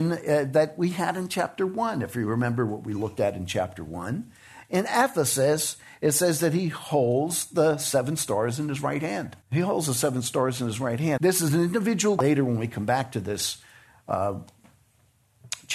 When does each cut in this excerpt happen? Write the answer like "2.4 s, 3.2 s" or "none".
9.4 s, 11.2 s